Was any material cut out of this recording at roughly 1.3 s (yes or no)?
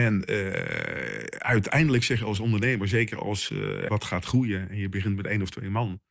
no